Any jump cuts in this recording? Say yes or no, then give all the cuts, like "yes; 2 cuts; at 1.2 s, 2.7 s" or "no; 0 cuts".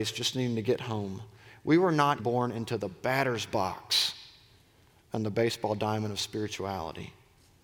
yes; 1 cut; at 2.2 s